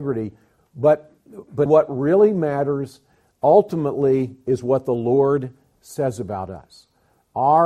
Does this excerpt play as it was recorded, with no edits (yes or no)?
no